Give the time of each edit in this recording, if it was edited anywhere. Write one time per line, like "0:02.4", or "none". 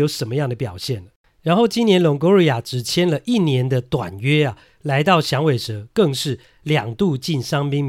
none